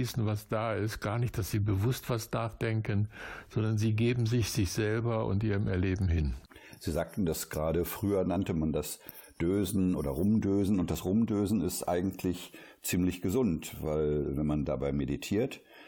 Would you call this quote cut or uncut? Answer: uncut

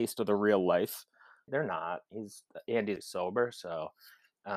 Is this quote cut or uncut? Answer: cut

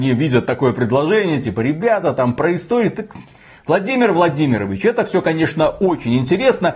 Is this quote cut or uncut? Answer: uncut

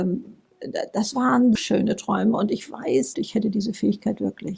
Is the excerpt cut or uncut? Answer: cut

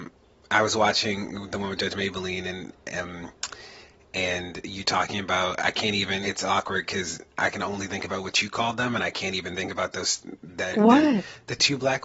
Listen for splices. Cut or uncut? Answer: cut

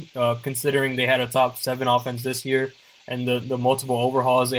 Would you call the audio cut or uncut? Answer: uncut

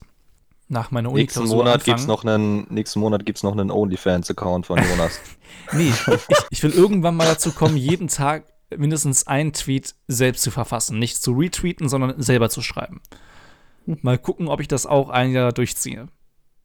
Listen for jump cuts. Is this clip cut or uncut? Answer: cut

